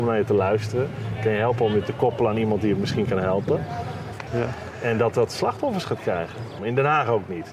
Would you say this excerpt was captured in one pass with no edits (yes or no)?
no